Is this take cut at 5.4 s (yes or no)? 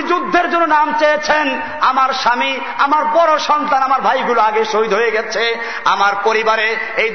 no